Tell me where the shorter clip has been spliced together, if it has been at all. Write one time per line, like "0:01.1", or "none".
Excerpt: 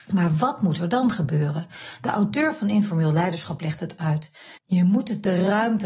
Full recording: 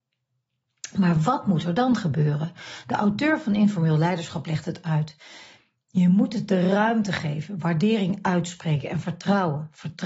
0:04.6